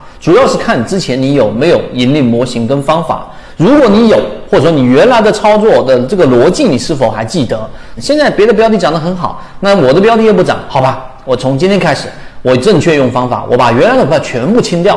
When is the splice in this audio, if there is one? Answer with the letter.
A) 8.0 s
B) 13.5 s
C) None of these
A